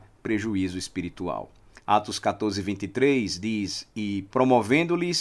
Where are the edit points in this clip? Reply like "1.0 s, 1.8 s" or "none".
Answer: 1.8 s